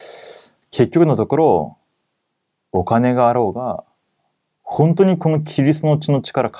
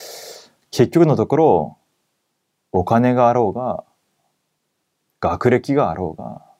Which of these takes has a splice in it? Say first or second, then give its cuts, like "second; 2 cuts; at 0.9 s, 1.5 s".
first; 1 cut; at 4.6 s